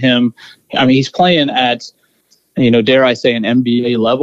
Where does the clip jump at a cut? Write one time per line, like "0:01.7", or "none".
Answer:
none